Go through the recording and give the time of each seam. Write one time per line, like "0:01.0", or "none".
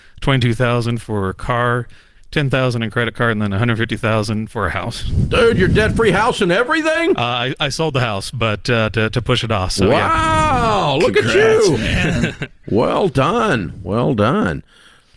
none